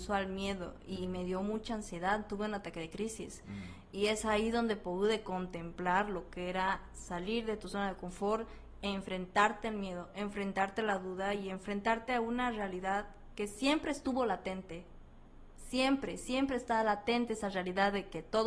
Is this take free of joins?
yes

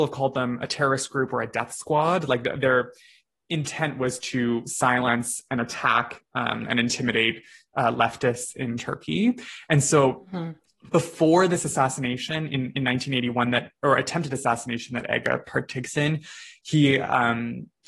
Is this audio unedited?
yes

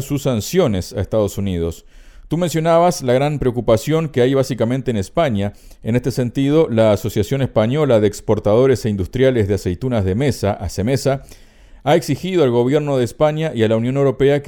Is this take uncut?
yes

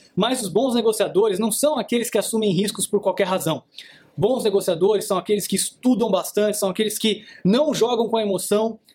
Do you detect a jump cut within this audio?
no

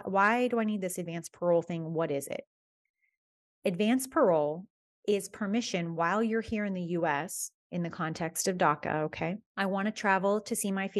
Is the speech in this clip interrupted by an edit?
yes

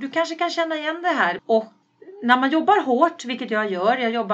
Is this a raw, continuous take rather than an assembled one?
no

